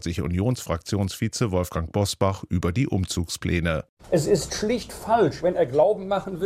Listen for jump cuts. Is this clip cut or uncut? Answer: uncut